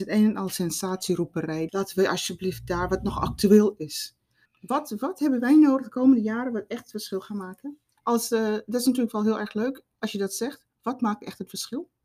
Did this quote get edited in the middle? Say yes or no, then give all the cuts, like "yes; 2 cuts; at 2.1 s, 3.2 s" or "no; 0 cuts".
yes; 3 cuts; at 1.7 s, 4.4 s, 8.0 s